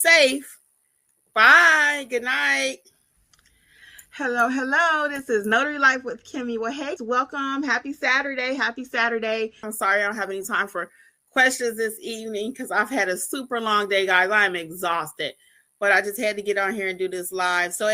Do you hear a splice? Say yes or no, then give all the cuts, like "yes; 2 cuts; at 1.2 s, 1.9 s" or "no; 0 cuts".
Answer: yes; 2 cuts; at 7.0 s, 9.6 s